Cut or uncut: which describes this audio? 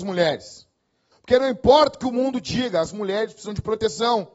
cut